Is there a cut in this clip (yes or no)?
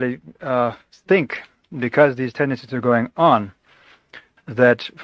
no